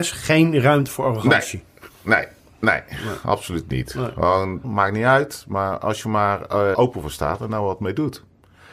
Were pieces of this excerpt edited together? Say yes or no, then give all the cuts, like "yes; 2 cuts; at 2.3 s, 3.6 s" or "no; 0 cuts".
yes; 2 cuts; at 4.6 s, 6.7 s